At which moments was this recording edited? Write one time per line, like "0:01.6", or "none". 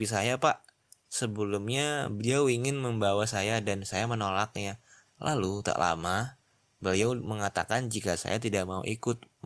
none